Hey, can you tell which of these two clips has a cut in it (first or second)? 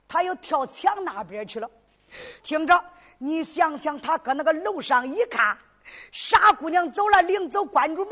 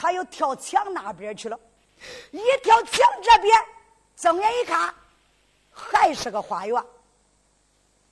first